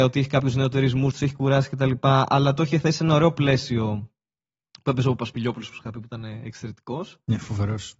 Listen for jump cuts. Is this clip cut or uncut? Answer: cut